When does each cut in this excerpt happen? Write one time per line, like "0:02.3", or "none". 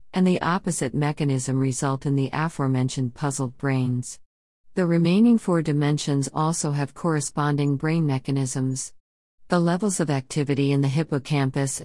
none